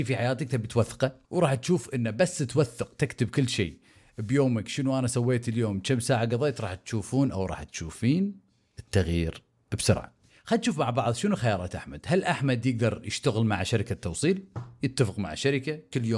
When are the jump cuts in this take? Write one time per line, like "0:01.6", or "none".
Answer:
0:01.2